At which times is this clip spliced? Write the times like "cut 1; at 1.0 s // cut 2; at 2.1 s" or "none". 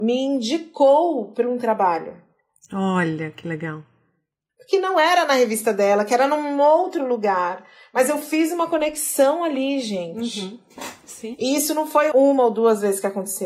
cut 1; at 12.1 s